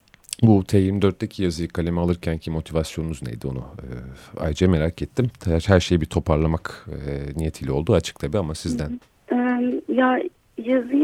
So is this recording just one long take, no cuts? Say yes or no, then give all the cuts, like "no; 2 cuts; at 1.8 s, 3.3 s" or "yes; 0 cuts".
no; 1 cut; at 9.1 s